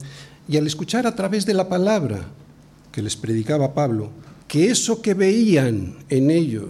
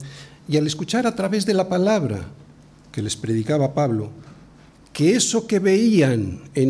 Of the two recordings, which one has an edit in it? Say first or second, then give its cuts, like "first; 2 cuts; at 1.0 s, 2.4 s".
first; 1 cut; at 4.4 s